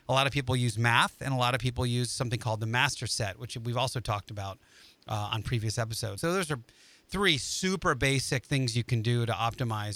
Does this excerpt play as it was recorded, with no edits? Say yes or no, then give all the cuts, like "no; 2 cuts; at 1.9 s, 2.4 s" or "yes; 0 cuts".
no; 1 cut; at 6.2 s